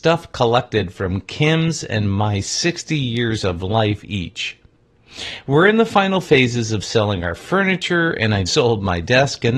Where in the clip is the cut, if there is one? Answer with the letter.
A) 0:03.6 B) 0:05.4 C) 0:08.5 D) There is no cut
C